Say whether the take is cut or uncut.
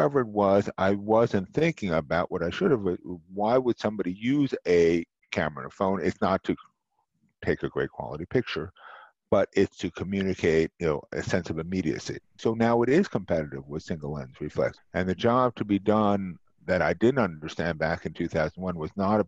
cut